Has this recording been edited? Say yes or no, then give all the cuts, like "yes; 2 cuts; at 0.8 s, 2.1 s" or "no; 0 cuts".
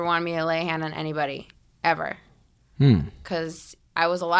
no; 0 cuts